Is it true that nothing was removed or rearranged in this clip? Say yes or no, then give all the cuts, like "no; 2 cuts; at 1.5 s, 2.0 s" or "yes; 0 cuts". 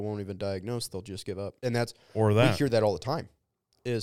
no; 1 cut; at 1.6 s